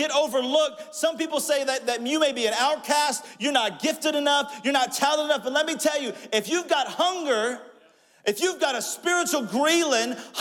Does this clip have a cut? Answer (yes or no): no